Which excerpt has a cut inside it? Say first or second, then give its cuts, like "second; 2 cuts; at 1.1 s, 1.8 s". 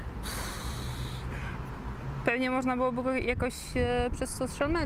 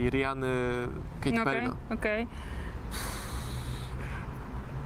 second; 1 cut; at 1.6 s